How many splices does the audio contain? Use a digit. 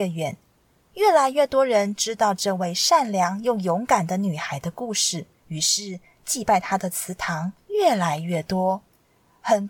1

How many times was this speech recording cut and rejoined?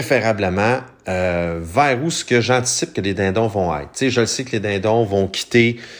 0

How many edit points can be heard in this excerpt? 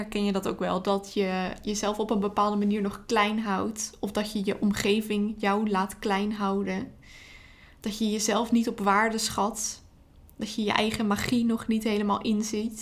0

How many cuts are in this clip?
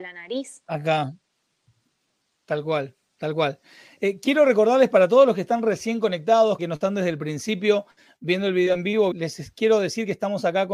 2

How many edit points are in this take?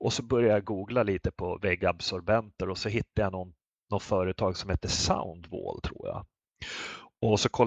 0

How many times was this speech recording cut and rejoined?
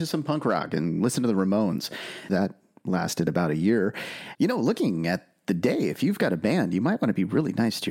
2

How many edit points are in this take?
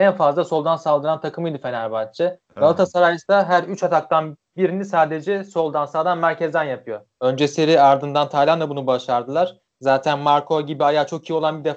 2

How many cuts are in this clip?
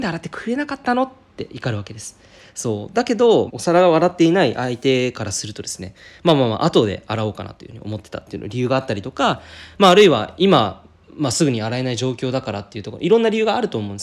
1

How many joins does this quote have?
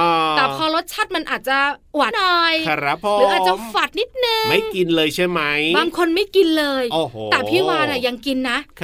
1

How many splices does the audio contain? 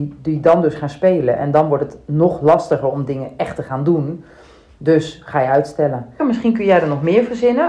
1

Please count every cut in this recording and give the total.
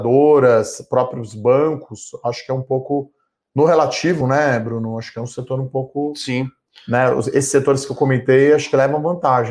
0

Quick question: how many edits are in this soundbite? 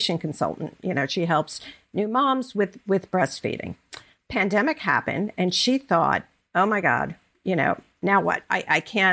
0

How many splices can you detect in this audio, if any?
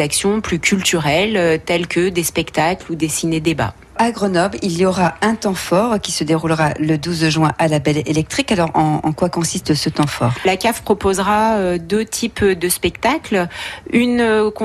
0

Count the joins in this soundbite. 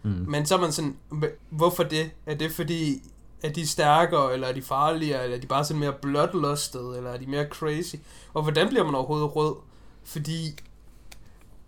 1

